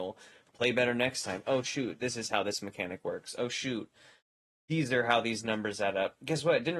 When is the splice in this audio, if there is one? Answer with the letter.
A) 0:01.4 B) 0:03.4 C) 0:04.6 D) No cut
D